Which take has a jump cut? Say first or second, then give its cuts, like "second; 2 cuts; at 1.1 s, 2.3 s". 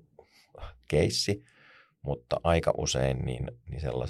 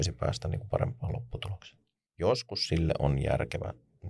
second; 1 cut; at 2.1 s